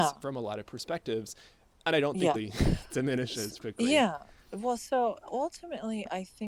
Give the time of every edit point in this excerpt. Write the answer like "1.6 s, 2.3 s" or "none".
2.3 s, 3.6 s